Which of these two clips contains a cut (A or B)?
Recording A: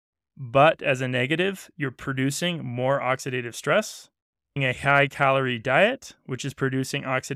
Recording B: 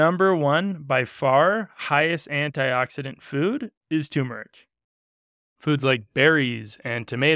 B